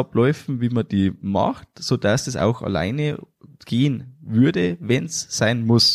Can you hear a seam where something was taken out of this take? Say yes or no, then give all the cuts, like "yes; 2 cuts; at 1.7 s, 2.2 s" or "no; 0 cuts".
no; 0 cuts